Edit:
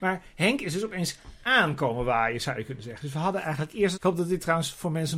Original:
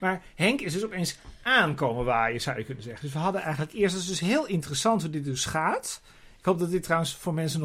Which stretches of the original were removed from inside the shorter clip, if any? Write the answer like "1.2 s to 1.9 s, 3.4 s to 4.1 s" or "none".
3.9 s to 6.4 s